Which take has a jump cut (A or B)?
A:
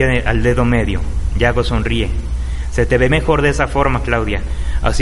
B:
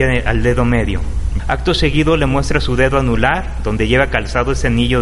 B